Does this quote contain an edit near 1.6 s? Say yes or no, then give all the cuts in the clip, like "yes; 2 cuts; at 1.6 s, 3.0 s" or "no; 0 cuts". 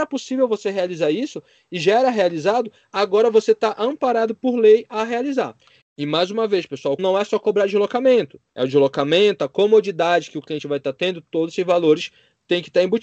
no; 3 cuts; at 5.8 s, 7.0 s, 8.5 s